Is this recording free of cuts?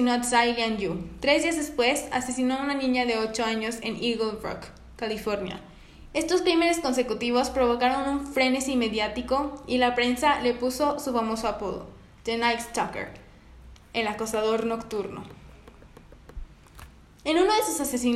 no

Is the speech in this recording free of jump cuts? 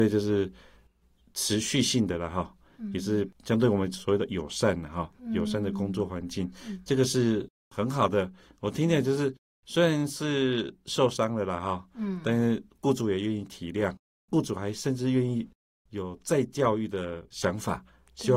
yes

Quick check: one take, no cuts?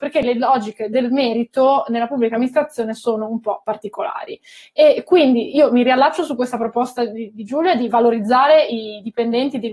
yes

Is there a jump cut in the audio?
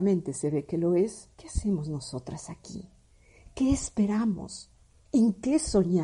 yes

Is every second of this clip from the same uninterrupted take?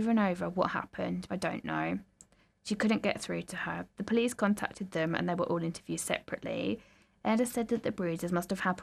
no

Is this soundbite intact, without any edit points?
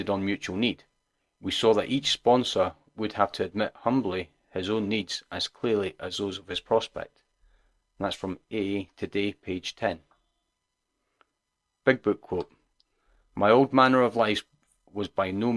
yes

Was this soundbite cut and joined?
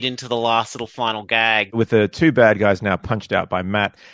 yes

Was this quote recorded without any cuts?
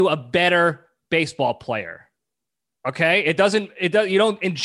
no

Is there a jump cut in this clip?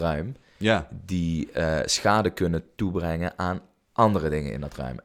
no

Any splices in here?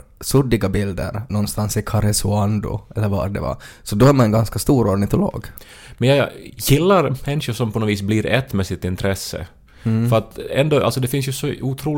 yes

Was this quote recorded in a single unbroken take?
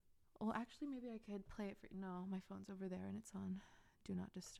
yes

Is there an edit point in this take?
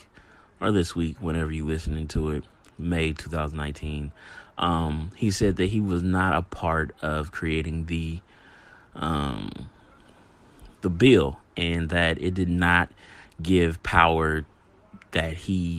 no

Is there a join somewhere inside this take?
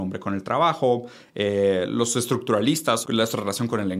yes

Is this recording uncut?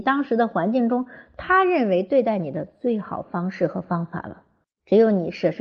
no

